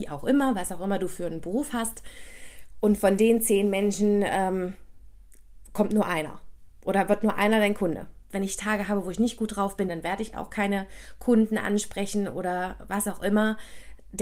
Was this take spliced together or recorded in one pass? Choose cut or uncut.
cut